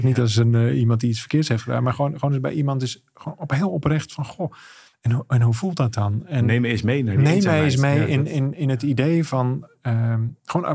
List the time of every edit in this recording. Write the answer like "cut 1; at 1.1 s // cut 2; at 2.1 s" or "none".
none